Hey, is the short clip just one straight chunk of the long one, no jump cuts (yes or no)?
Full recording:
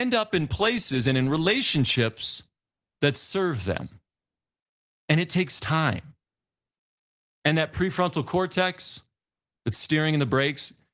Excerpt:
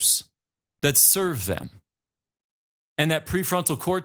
no